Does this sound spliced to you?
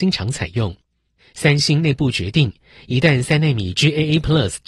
yes; 1 cut; at 1.2 s

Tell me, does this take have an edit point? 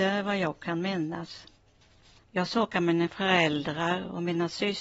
yes; 1 cut; at 2.2 s

